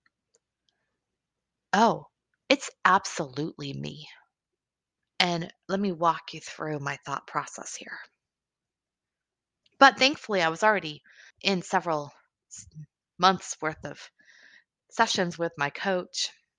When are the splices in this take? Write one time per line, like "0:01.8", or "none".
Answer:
0:05.0
0:09.6
0:11.3